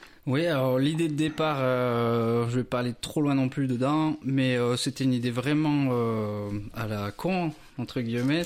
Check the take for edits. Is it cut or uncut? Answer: uncut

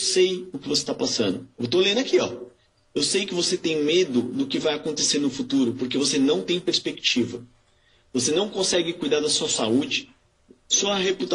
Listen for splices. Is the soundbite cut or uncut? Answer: uncut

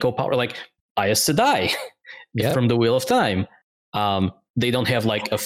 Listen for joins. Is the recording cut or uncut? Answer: uncut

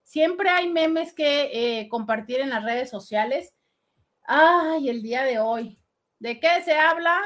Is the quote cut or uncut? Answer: cut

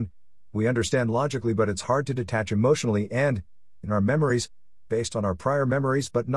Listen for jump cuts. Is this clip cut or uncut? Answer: uncut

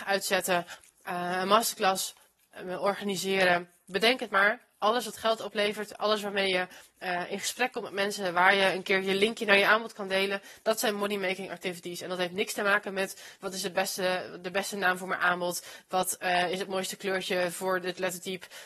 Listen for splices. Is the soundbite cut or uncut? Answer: uncut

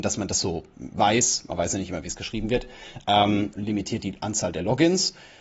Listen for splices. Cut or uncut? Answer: cut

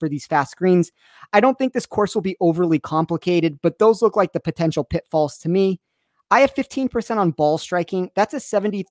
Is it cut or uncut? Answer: uncut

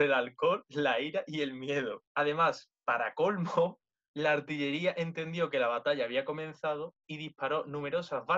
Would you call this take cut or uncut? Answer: uncut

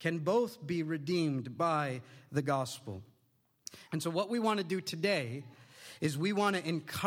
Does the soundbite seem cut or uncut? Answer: cut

